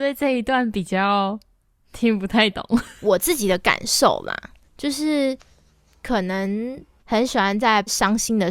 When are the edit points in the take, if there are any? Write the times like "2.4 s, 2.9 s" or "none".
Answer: 4.6 s, 7.0 s